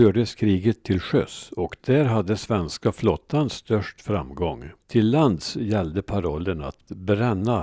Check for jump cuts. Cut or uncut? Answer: cut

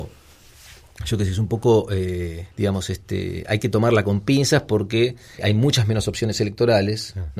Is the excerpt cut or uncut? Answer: cut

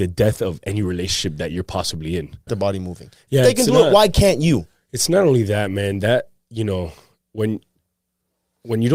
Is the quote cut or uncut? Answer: cut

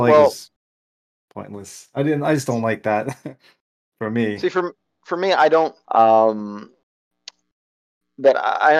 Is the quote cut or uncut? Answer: cut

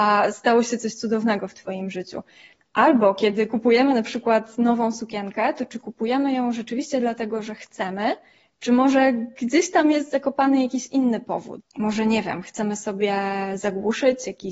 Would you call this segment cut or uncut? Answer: cut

